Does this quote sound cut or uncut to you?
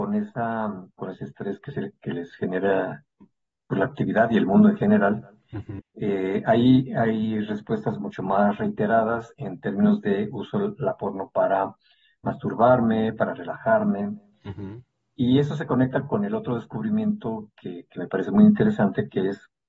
cut